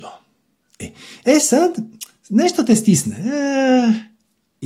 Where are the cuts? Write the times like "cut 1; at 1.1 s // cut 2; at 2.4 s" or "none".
none